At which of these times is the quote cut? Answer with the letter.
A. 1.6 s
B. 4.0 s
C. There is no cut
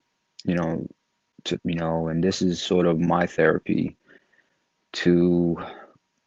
A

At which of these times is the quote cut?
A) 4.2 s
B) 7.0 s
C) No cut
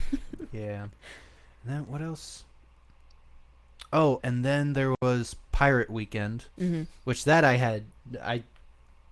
A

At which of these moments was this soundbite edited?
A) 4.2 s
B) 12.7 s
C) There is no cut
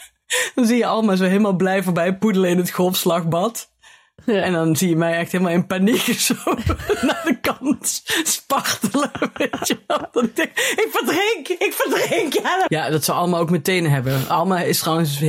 B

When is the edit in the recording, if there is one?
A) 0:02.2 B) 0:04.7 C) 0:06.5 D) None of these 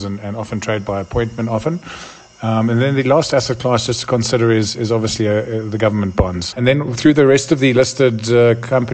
C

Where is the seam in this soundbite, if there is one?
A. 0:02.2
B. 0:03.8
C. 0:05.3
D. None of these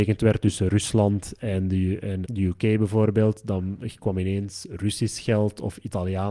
A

